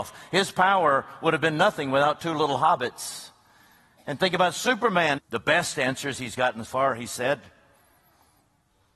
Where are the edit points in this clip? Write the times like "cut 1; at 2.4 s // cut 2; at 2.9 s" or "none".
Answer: cut 1; at 5.2 s // cut 2; at 6.7 s